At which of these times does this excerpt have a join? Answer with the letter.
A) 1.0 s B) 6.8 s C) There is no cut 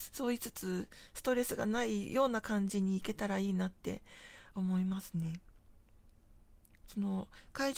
B